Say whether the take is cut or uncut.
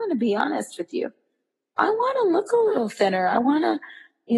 uncut